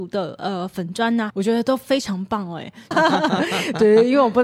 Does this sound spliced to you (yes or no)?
yes